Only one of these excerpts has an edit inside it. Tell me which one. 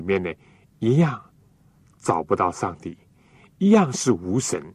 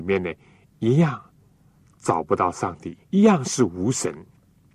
second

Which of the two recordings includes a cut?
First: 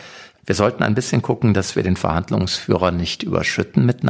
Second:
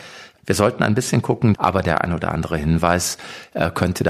second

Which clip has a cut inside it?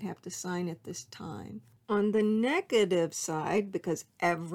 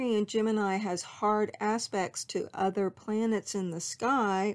first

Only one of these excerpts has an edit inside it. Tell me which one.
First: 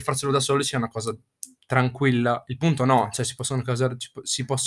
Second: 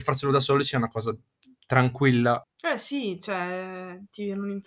second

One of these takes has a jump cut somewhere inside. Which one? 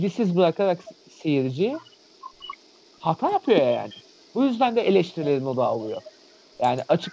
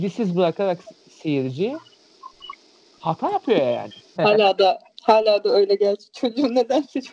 second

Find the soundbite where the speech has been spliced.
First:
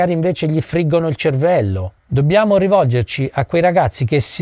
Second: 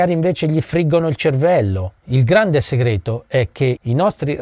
second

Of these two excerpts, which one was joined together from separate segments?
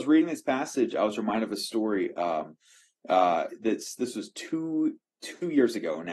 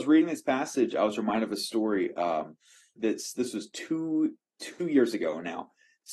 second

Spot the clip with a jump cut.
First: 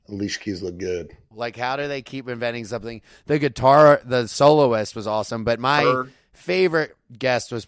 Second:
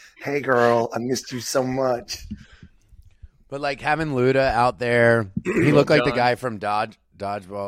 first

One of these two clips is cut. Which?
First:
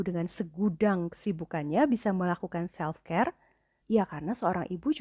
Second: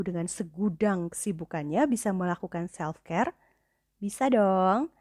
first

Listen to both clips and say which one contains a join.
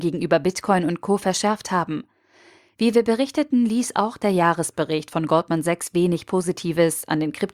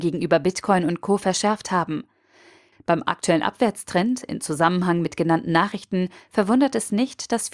second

